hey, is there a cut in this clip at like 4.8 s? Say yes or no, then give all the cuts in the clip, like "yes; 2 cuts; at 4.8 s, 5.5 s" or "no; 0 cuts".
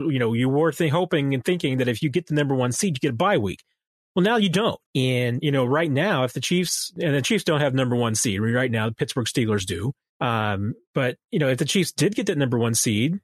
yes; 2 cuts; at 4.8 s, 10.1 s